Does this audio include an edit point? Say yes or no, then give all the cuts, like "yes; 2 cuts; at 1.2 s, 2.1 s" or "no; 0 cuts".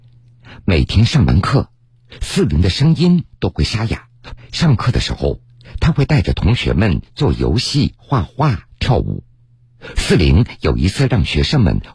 yes; 2 cuts; at 4.4 s, 9.9 s